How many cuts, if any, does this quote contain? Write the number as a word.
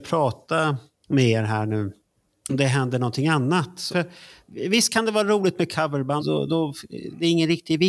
three